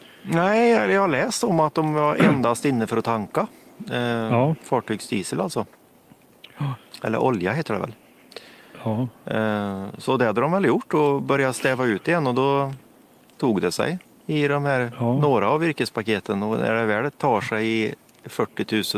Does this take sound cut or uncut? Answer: uncut